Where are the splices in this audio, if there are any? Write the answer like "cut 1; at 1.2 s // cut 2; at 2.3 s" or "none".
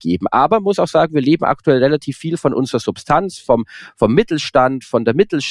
none